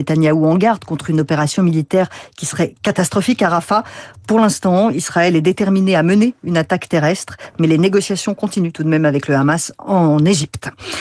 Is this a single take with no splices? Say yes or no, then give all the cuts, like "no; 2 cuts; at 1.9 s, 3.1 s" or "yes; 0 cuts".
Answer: yes; 0 cuts